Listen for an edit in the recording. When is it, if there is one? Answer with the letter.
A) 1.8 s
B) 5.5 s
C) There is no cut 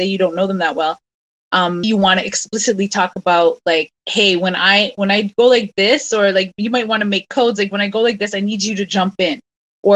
A